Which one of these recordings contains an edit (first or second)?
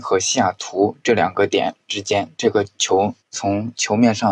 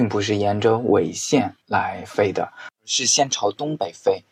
first